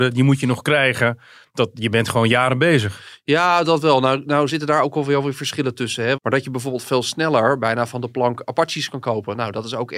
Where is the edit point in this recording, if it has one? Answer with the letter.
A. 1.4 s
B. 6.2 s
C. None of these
B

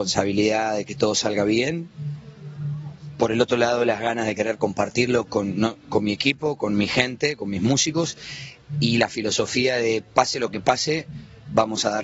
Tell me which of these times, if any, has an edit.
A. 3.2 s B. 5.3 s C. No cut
B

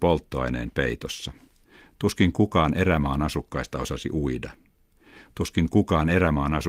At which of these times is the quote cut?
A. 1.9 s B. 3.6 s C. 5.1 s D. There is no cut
D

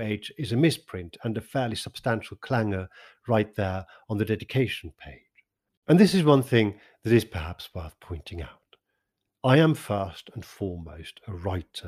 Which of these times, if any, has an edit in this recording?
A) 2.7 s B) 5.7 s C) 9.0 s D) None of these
B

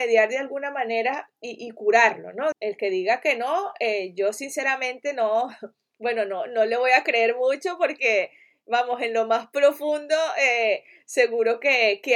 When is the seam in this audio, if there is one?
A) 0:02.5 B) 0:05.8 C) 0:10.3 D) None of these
A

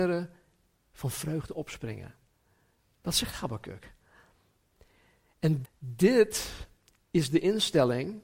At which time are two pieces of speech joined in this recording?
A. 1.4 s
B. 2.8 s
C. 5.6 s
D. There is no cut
C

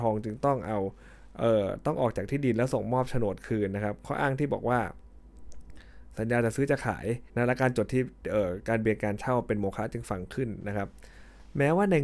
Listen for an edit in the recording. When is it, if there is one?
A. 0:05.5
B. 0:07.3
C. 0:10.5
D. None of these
B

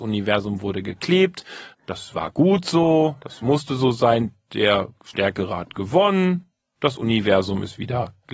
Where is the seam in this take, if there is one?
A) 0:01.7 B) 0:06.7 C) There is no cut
A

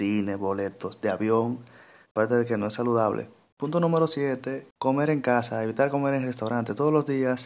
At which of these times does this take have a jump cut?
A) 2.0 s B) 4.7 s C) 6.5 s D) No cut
A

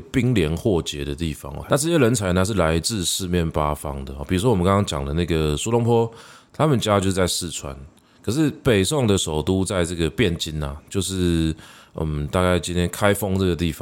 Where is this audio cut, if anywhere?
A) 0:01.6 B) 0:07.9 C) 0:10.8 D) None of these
A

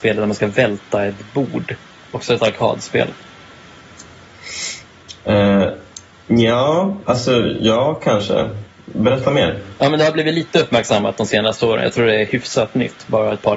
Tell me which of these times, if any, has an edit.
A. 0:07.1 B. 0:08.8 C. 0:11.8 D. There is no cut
D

